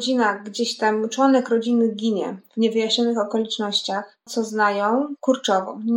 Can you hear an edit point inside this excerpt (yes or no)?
yes